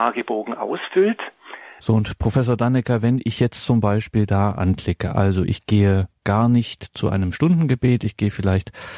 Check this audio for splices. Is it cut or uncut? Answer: cut